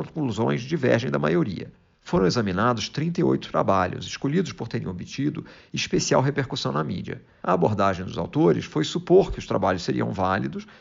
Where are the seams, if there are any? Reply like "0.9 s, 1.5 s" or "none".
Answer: none